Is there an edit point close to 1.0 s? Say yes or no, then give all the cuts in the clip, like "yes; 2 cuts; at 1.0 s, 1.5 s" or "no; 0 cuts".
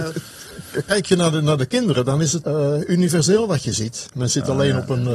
no; 2 cuts; at 2.4 s, 4.1 s